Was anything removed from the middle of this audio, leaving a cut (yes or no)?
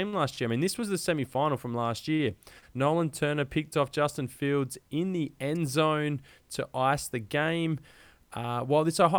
no